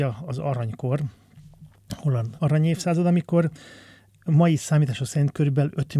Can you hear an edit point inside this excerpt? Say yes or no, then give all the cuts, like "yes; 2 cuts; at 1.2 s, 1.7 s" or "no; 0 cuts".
yes; 1 cut; at 2.4 s